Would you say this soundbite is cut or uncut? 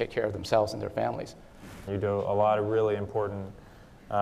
cut